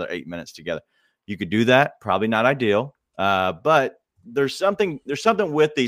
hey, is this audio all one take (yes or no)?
yes